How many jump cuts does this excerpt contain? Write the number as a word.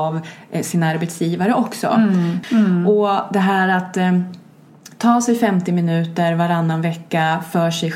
one